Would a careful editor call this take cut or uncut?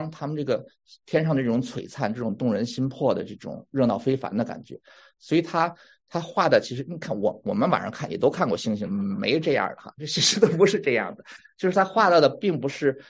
uncut